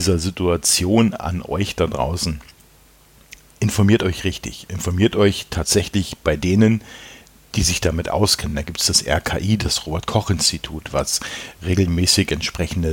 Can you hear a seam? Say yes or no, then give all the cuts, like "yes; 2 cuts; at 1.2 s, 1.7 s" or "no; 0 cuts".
no; 0 cuts